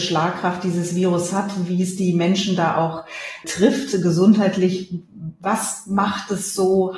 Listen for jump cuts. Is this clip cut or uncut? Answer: cut